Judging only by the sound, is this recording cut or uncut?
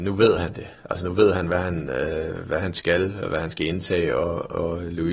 uncut